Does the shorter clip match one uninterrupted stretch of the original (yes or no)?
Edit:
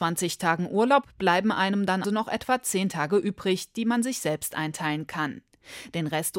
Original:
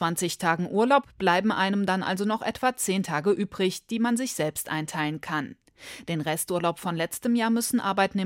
no